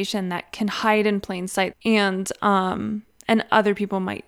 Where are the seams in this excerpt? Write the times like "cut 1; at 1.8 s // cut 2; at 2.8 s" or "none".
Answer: cut 1; at 1.7 s